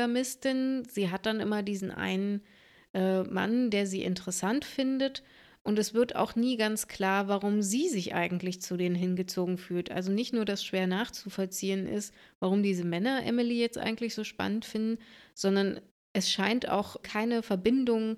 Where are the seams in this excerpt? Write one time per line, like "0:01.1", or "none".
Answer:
0:17.0